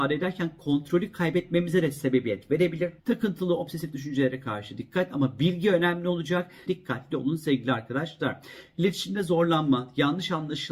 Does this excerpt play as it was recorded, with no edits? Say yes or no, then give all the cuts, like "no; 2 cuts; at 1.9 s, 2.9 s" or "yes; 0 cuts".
no; 2 cuts; at 3.0 s, 6.7 s